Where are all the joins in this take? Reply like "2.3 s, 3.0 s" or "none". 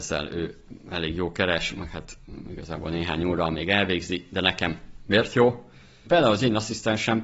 6.1 s